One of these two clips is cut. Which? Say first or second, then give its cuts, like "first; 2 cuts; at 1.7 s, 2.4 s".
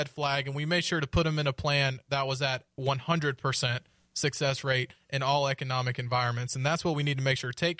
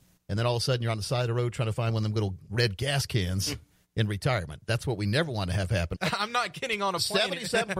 second; 1 cut; at 5.9 s